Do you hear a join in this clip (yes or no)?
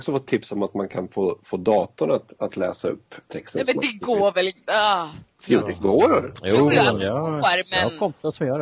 no